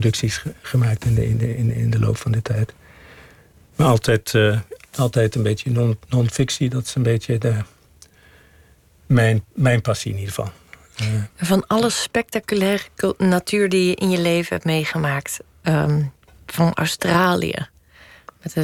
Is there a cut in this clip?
yes; 1 cut; at 11.3 s

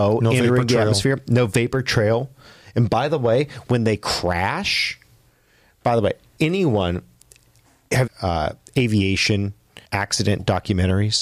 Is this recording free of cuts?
no; 2 cuts; at 8.1 s, 9.9 s

